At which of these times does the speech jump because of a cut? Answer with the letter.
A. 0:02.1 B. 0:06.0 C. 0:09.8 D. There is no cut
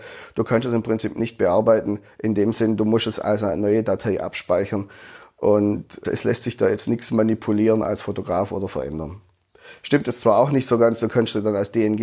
B